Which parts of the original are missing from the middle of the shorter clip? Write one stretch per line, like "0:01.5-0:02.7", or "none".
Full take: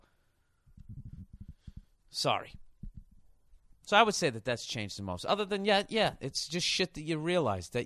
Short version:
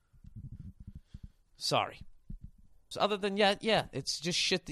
0:03.4-0:05.2